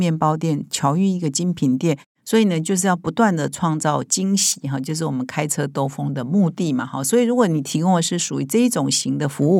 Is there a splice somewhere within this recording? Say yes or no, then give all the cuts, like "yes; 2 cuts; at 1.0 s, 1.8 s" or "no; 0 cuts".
no; 0 cuts